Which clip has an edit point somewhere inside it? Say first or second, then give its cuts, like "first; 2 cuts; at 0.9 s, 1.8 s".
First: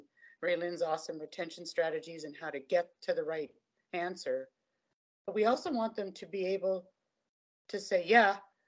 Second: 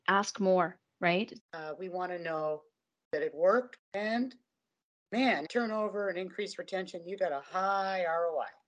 second; 3 cuts; at 1.4 s, 3.8 s, 5.4 s